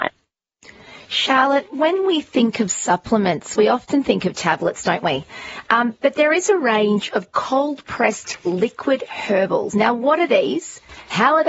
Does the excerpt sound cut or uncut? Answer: uncut